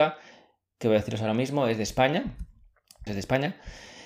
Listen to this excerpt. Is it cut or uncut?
cut